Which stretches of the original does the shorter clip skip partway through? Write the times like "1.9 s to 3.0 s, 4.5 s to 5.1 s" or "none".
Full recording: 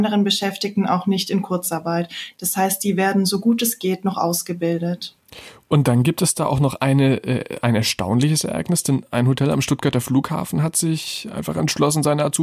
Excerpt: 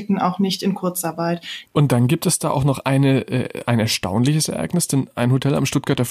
2.3 s to 5.6 s